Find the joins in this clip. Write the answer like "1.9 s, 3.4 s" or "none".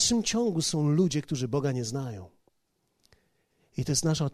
none